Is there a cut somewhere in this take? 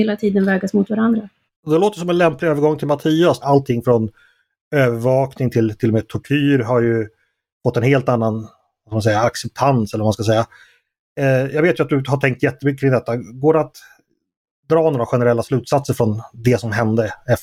yes; 2 cuts; at 1.5 s, 3.4 s

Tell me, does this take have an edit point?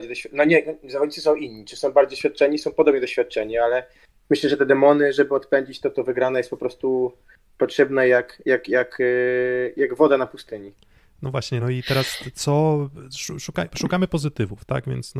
no; 0 cuts

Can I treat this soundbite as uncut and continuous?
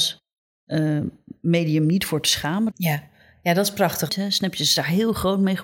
no; 2 cuts; at 2.7 s, 4.1 s

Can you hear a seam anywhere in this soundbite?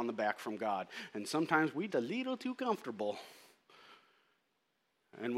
yes; 1 cut; at 1.9 s

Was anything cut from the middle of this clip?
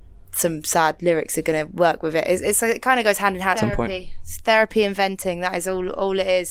yes; 1 cut; at 3.5 s

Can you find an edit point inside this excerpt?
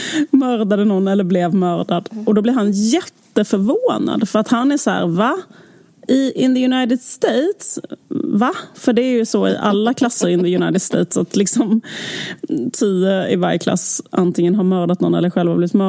no; 0 cuts

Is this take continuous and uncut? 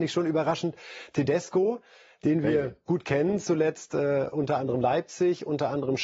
yes; 0 cuts

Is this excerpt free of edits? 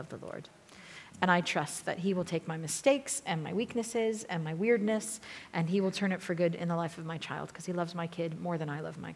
yes; 0 cuts

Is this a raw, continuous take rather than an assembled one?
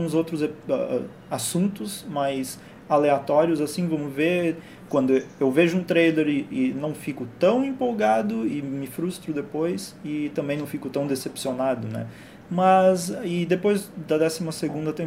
no; 2 cuts; at 4.9 s, 12.4 s

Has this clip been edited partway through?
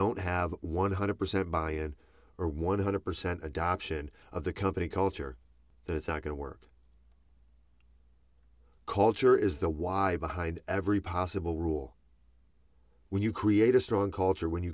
no; 0 cuts

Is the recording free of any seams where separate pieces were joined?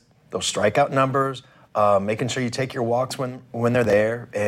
yes; 0 cuts

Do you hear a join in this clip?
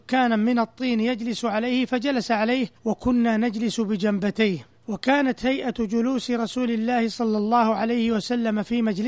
yes; 2 cuts; at 2.8 s, 4.8 s

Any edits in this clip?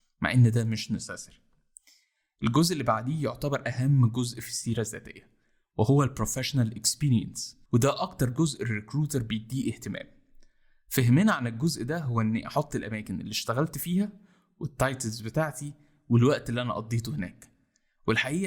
yes; 1 cut; at 7.7 s

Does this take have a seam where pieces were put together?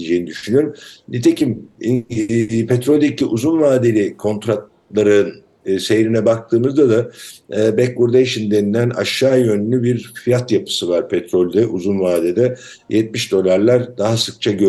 no; 0 cuts

